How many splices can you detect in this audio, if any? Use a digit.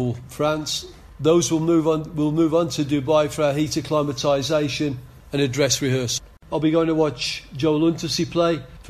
0